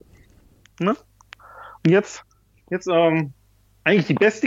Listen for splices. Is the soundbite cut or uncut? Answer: uncut